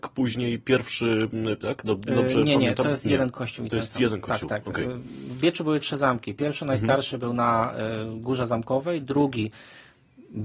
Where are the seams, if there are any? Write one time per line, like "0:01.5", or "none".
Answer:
0:01.6